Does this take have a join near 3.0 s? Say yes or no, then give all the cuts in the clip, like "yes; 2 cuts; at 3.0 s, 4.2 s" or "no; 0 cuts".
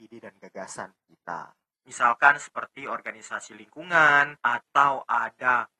no; 2 cuts; at 1.7 s, 4.4 s